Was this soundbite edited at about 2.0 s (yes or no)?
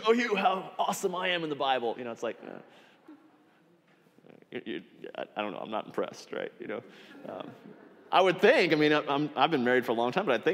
no